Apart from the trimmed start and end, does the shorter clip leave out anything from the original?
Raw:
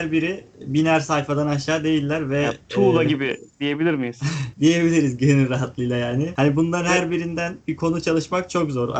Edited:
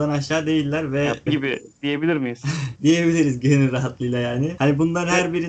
yes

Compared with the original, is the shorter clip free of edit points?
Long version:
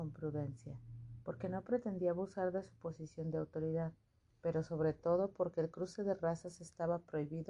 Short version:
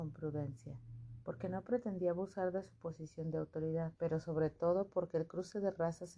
no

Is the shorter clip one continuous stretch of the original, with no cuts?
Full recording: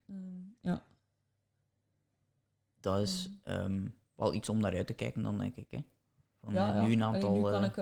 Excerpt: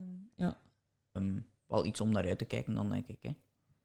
no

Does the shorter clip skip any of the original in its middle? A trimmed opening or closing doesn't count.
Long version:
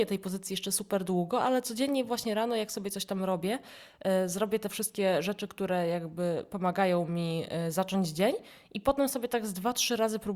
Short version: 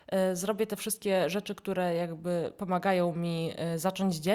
no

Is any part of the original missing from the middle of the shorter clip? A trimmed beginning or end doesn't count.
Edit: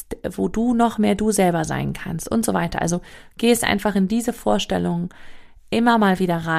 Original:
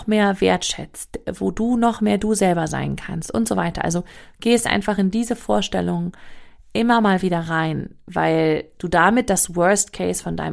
no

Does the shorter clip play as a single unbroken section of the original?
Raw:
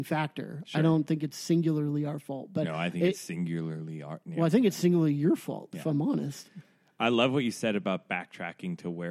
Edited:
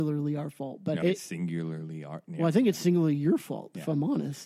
no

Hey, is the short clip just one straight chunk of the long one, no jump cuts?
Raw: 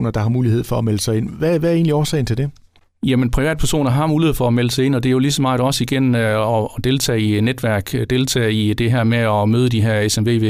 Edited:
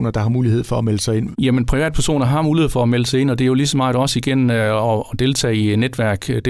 no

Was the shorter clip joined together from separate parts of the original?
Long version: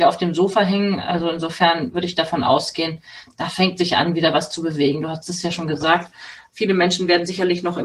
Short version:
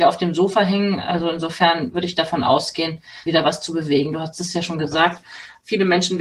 yes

